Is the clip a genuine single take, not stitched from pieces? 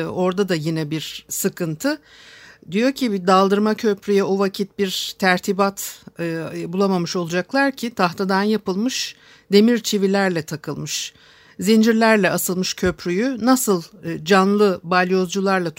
yes; 0 cuts

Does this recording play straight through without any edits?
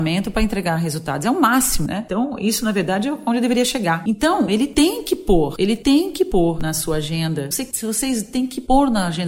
no; 2 cuts; at 4.5 s, 7.5 s

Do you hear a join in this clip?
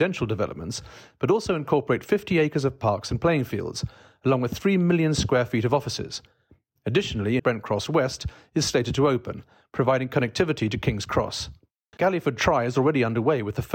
yes; 2 cuts; at 7.4 s, 11.9 s

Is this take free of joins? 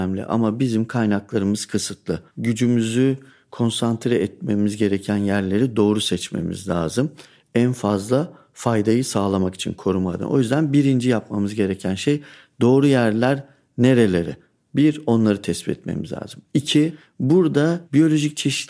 yes; 0 cuts

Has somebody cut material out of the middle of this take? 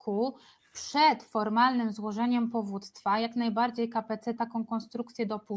yes; 1 cut; at 4.4 s

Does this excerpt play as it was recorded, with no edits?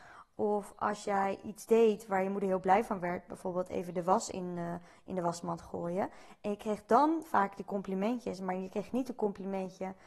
yes; 0 cuts

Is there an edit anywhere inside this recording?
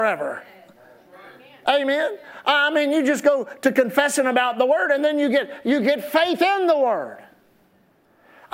no; 0 cuts

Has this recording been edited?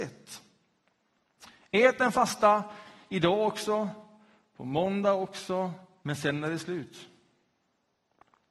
yes; 1 cut; at 6.0 s

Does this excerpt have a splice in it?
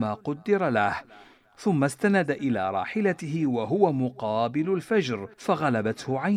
yes; 1 cut; at 5.3 s

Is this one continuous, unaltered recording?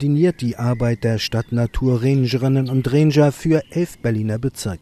yes; 0 cuts

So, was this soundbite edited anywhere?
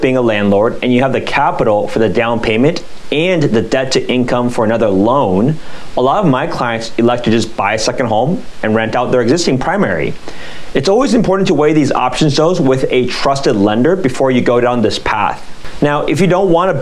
no; 0 cuts

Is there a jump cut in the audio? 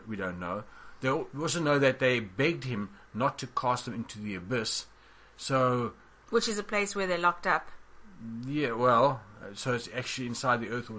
no; 0 cuts

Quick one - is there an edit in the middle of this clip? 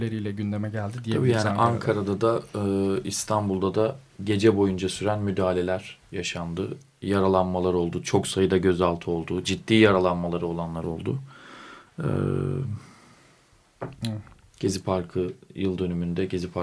no; 0 cuts

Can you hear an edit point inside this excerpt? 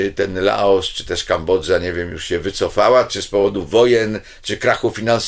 no; 0 cuts

